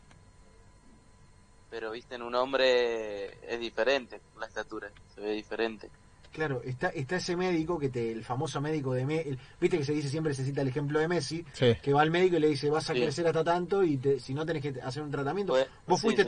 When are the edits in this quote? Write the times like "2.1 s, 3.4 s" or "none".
none